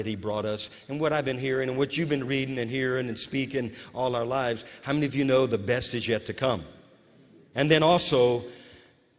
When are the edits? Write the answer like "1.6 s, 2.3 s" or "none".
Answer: 7.5 s